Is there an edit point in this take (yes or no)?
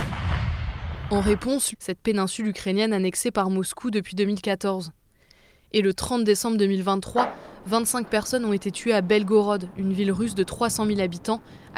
yes